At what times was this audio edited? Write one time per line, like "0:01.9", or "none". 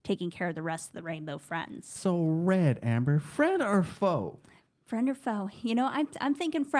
none